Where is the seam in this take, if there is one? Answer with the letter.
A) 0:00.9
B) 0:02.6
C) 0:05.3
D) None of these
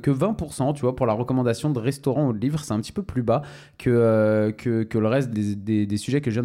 C